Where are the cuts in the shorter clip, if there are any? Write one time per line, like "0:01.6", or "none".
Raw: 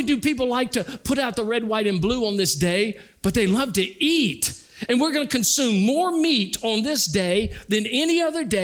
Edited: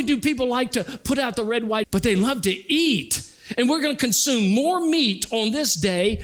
0:01.8